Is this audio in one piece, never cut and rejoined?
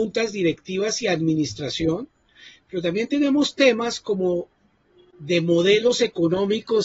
yes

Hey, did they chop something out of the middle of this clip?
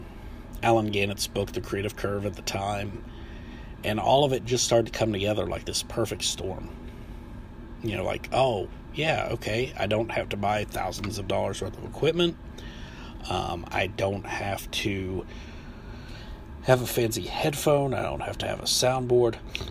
no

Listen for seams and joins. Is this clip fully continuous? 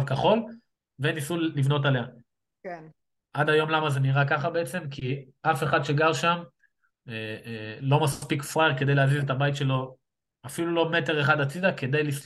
yes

